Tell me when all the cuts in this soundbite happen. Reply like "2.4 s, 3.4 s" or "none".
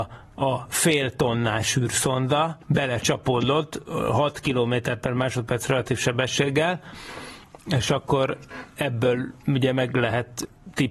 2.6 s